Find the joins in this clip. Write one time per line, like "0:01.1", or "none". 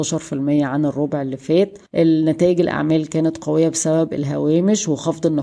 0:01.9